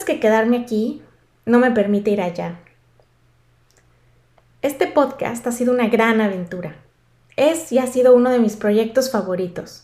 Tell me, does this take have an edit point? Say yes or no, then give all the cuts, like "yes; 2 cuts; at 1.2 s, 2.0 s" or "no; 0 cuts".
no; 0 cuts